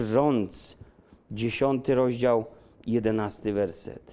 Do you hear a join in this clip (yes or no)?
no